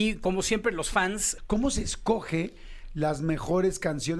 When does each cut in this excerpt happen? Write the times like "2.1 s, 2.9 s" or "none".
1.4 s